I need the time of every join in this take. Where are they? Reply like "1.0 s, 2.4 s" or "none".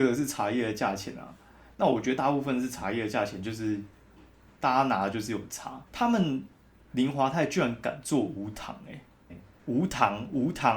5.9 s, 9.3 s

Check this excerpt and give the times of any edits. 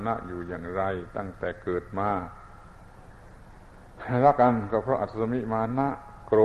4.3 s

